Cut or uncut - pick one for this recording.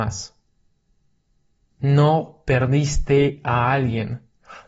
cut